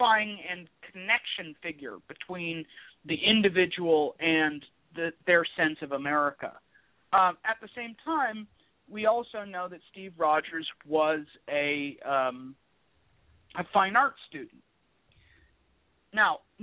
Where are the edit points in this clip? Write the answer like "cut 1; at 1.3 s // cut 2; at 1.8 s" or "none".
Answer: none

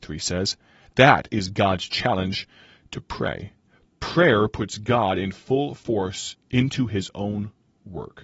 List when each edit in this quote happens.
none

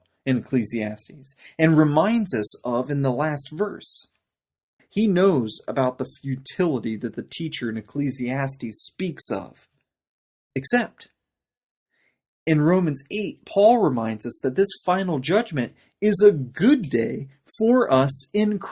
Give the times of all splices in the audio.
cut 1; at 4.8 s // cut 2; at 10.5 s

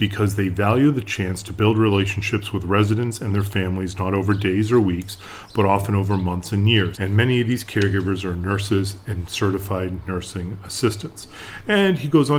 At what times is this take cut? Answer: cut 1; at 6.9 s

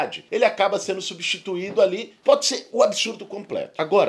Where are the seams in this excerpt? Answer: cut 1; at 2.2 s

